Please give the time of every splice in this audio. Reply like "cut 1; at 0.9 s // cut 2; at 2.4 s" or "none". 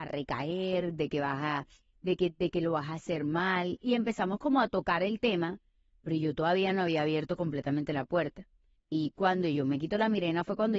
cut 1; at 8.8 s